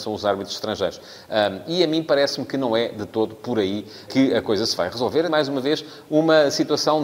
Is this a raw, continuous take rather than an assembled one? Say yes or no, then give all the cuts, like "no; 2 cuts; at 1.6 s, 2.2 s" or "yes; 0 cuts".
no; 2 cuts; at 4.1 s, 5.3 s